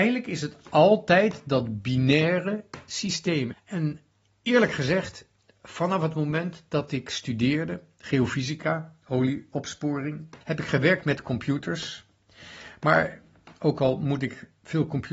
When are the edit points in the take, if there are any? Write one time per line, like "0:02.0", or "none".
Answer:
0:03.5
0:10.4